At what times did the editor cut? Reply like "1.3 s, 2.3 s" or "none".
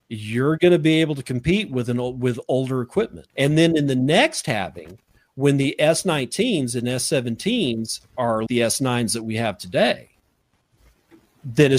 3.3 s, 8.5 s